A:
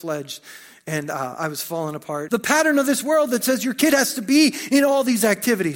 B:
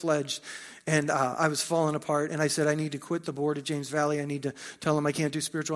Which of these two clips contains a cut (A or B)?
A